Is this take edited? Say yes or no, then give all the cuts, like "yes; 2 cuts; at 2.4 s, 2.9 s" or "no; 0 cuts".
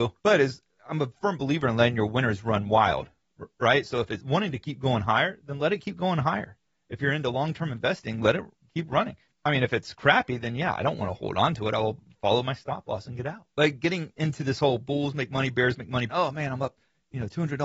yes; 1 cut; at 16.1 s